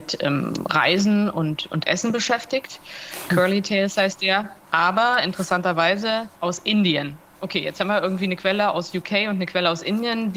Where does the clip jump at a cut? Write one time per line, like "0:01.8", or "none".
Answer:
0:06.3